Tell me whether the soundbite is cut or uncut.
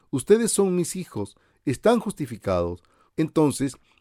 cut